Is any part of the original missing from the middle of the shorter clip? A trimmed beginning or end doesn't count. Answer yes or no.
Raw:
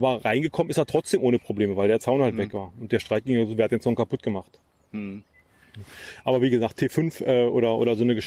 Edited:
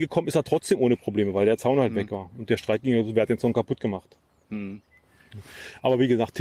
no